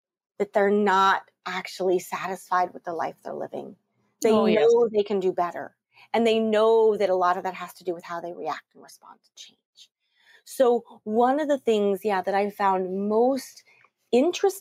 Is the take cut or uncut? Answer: uncut